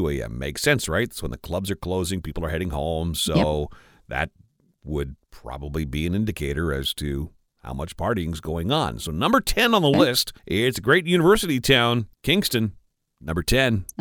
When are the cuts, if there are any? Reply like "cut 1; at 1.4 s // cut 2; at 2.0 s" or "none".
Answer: cut 1; at 10.4 s // cut 2; at 12.1 s